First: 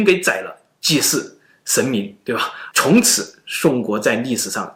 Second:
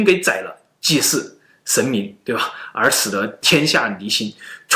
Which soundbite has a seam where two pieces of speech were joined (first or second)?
first